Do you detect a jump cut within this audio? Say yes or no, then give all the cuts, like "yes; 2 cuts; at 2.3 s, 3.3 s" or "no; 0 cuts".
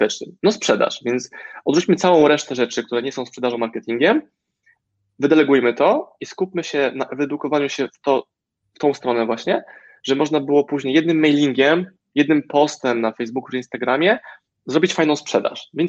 no; 0 cuts